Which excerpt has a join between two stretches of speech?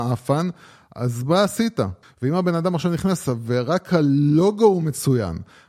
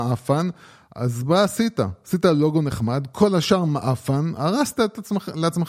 first; 1 cut; at 2.0 s

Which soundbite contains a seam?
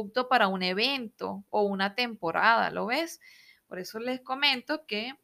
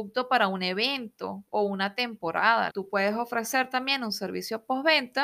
second; 1 cut; at 2.7 s

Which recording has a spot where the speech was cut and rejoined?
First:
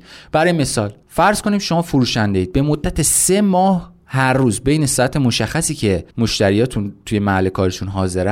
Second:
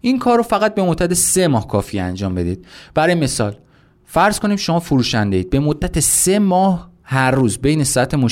first; 2 cuts; at 1.0 s, 6.1 s

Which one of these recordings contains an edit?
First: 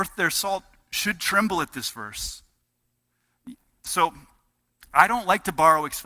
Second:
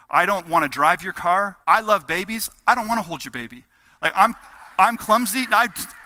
second; 1 cut; at 1.6 s

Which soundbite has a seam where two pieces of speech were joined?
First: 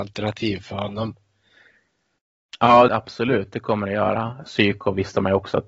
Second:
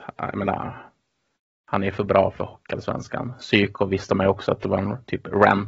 first; 2 cuts; at 2.9 s, 4.4 s

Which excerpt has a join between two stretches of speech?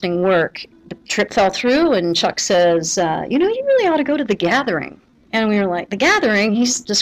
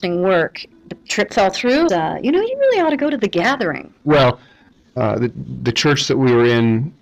second; 2 cuts; at 1.9 s, 4.0 s

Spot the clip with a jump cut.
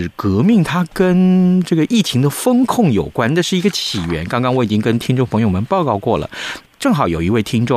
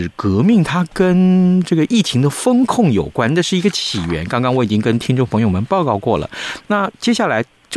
first; 1 cut; at 6.7 s

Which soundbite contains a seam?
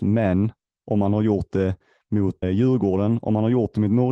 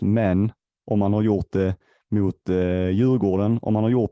first; 1 cut; at 2.4 s

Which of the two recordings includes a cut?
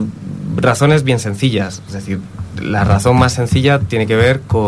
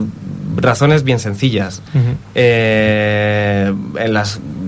second; 1 cut; at 1.9 s

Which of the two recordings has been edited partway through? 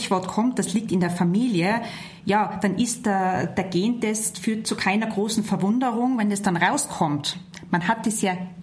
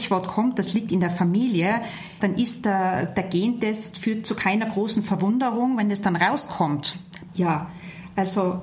second; 2 cuts; at 2.2 s, 7.3 s

